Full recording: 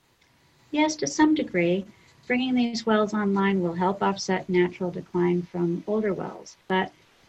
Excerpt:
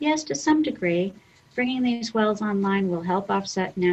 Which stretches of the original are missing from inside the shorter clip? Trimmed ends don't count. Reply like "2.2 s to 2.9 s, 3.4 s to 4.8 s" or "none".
none

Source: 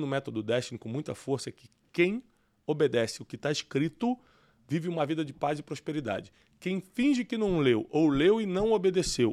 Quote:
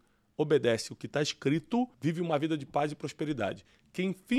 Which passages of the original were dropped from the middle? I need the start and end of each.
4.2 s to 4.6 s

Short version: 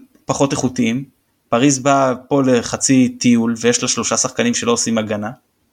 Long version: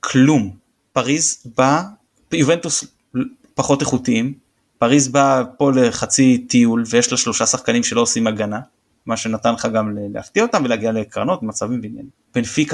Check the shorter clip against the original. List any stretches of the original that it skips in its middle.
none

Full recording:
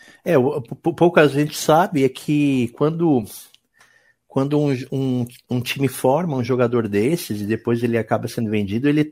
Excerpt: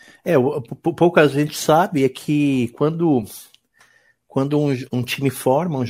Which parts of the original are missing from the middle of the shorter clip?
4.9 s to 5.4 s

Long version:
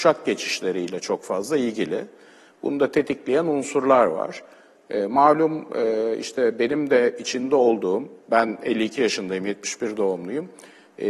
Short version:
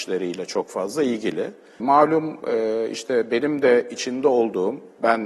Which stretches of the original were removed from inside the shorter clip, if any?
2.3 s to 5.1 s

